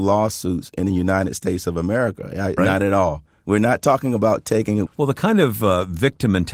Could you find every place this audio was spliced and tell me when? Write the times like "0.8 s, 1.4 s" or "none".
2.6 s, 4.9 s

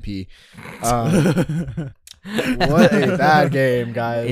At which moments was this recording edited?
1.9 s

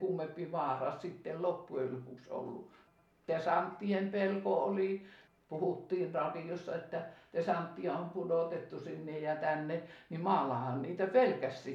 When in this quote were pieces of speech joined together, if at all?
none

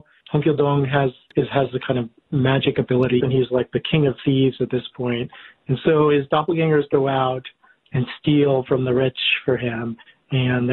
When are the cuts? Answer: 3.2 s

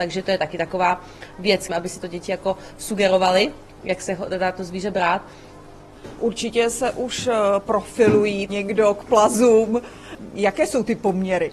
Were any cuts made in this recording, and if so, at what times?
1.7 s, 8.5 s

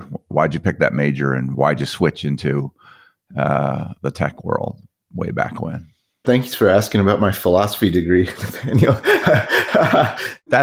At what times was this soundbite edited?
6.2 s

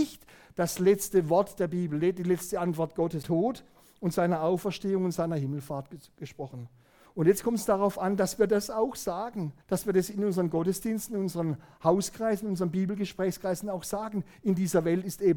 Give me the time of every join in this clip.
3.2 s, 7.1 s, 9.6 s

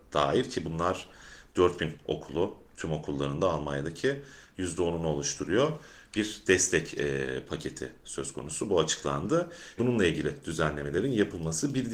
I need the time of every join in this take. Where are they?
9.8 s

